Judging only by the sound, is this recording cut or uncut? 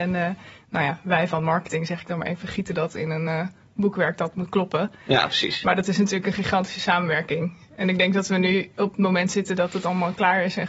uncut